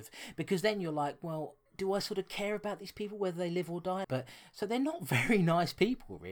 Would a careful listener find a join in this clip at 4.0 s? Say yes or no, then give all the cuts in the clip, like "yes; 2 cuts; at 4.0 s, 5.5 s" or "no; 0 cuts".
yes; 2 cuts; at 1.7 s, 4.0 s